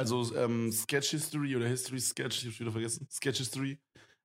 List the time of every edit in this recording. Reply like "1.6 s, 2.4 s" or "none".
none

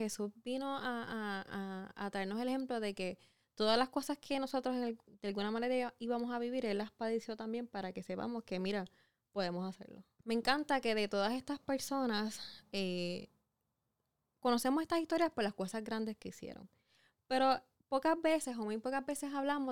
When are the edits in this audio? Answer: 10.2 s

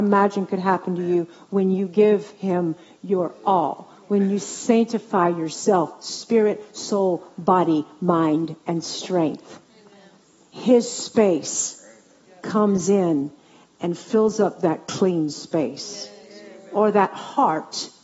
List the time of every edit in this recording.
none

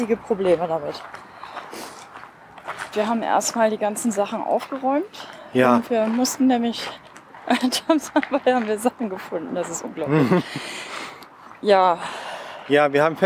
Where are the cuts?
2.9 s

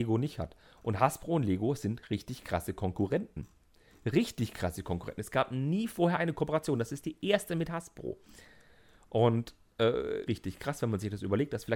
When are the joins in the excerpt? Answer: 10.3 s

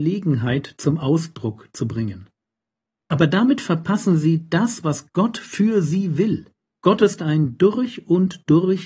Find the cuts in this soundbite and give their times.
6.8 s

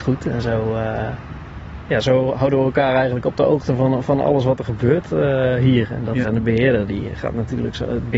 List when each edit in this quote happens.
6.2 s

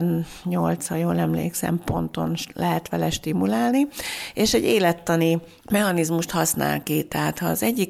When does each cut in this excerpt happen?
none

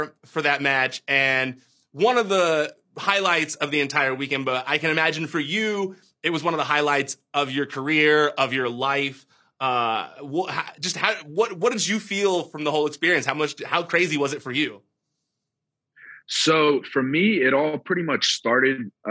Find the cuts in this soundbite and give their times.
none

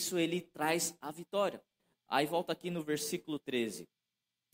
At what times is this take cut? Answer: none

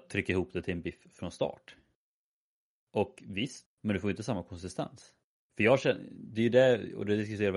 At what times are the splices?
3.6 s, 5.3 s

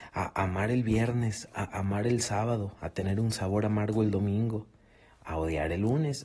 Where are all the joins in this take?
none

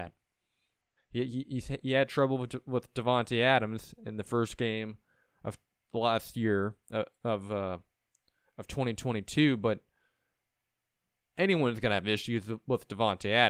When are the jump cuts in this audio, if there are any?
1.0 s

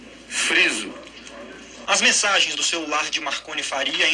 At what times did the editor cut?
1.9 s

